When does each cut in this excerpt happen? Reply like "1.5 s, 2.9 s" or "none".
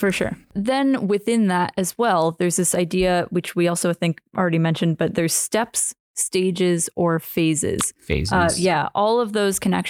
none